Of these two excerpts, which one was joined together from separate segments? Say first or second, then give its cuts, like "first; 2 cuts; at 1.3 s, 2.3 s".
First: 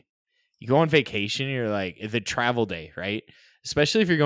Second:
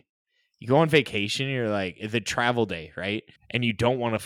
second; 1 cut; at 3.4 s